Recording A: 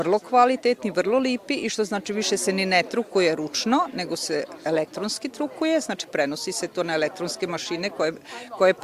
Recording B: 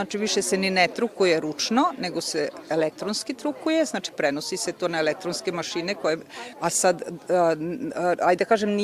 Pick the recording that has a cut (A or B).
B